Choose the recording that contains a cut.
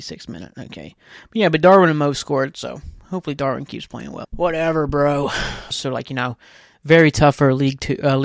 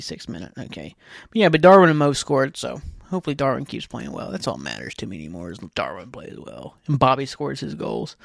first; 2 cuts; at 4.2 s, 5.7 s

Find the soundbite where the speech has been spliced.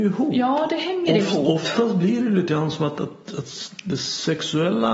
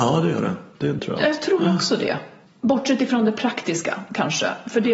second; 2 cuts; at 1.0 s, 2.4 s

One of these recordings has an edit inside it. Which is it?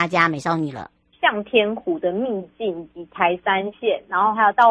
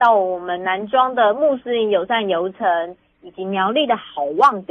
first; 1 cut; at 1.1 s

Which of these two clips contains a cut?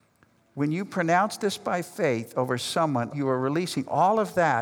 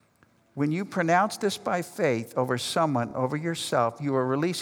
first; 1 cut; at 3.1 s

